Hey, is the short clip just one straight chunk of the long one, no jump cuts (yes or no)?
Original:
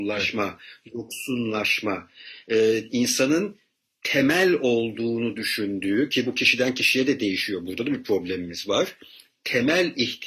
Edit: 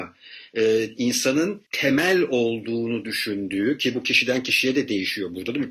no